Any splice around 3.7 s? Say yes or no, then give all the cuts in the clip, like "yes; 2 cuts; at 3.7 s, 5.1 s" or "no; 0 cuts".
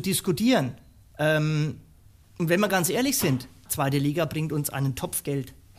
yes; 2 cuts; at 1.1 s, 3.7 s